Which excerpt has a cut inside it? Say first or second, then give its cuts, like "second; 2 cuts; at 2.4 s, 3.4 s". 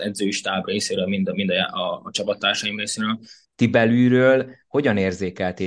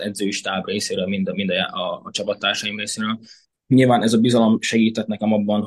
first; 1 cut; at 3.5 s